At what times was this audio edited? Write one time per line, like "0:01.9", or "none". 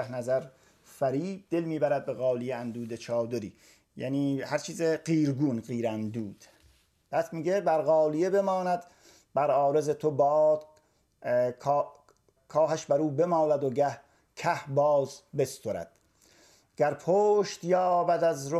0:12.4